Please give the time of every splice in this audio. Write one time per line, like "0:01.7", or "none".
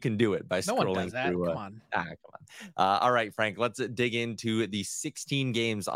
none